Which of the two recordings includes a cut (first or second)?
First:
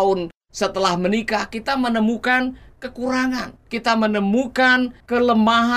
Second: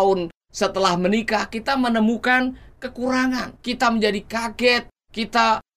second